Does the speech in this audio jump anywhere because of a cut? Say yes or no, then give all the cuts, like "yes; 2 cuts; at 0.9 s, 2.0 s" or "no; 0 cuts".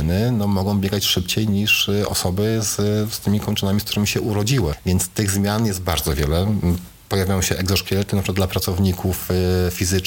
no; 0 cuts